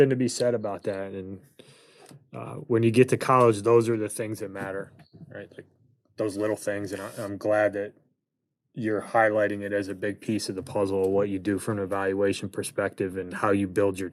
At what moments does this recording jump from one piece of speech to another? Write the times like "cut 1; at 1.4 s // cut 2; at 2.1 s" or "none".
none